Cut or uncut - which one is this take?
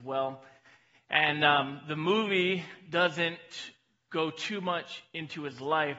uncut